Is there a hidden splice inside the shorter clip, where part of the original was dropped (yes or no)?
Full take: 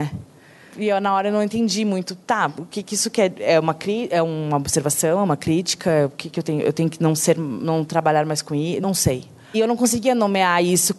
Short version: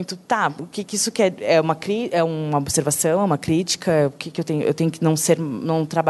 no